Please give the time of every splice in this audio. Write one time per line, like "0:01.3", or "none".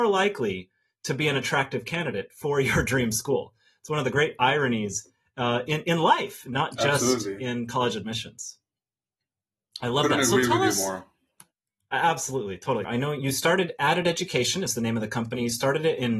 0:12.8